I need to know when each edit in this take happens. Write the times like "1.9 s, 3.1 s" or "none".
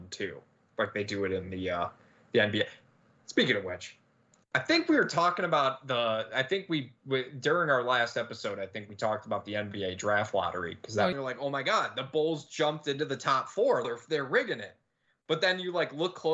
11.1 s, 13.8 s